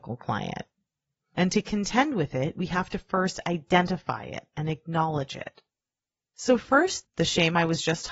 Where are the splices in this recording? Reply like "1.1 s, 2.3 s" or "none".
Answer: 7.0 s